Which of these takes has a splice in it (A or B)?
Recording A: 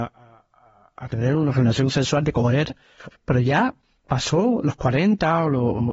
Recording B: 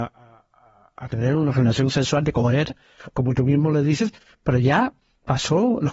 A